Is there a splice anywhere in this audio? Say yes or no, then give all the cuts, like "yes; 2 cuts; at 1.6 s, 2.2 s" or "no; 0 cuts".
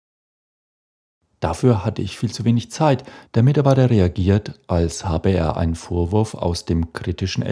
yes; 2 cuts; at 1.3 s, 3.2 s